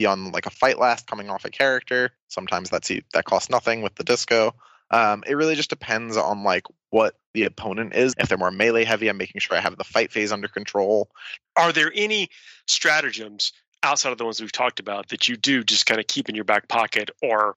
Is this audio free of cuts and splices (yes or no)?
no